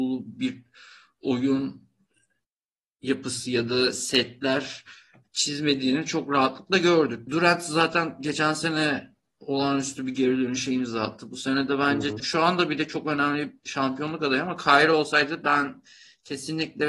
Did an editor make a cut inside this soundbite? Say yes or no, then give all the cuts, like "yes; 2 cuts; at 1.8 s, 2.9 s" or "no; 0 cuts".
yes; 2 cuts; at 7.3 s, 12.2 s